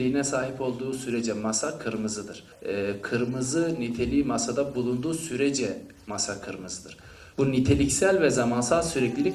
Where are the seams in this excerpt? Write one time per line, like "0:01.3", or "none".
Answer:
0:02.5
0:07.3